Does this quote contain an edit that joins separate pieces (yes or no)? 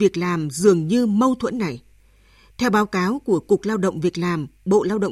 no